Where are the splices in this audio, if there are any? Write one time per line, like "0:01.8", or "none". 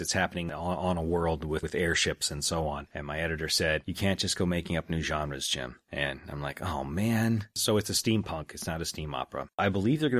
0:02.9